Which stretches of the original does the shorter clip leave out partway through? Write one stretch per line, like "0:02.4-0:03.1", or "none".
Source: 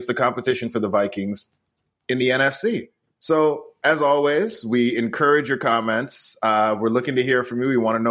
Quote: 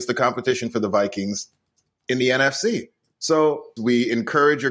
0:03.8-0:04.6